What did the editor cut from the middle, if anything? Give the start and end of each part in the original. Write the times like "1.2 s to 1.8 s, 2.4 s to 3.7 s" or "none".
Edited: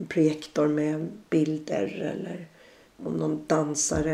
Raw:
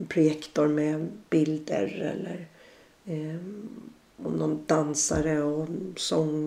2.9 s to 4.0 s